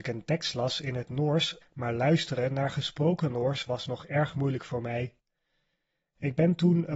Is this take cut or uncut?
cut